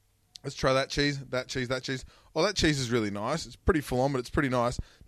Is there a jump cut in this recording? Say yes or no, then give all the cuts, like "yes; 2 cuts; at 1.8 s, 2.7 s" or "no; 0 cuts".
no; 0 cuts